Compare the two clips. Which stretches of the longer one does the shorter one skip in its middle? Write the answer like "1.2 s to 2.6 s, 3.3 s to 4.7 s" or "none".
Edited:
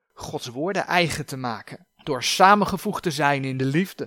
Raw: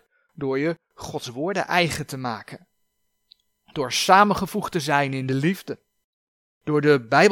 2.7 s to 3.6 s